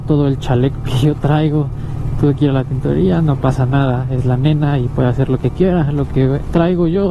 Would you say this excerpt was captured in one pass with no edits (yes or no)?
yes